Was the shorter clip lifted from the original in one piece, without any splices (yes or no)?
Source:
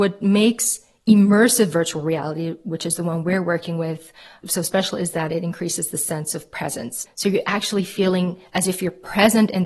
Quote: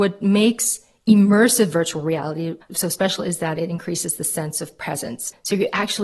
no